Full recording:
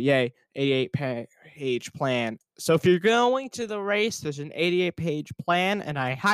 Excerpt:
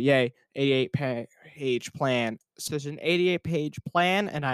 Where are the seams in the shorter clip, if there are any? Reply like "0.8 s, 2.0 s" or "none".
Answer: 2.7 s